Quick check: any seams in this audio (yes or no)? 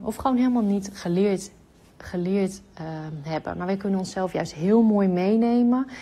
no